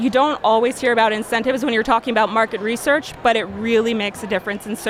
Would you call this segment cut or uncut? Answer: uncut